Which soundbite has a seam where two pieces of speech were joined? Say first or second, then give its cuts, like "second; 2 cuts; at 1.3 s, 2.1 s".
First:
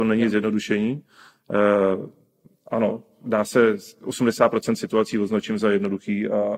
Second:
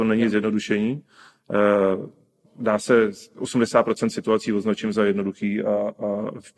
second; 1 cut; at 2.5 s